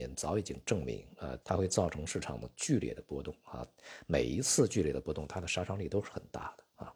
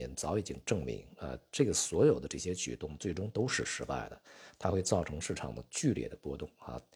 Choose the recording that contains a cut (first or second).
first